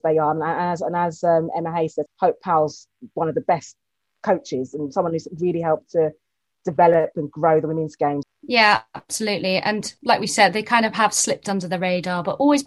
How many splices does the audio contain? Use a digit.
2